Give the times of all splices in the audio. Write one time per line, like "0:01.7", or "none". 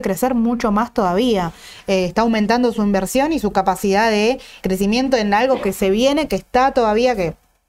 0:04.6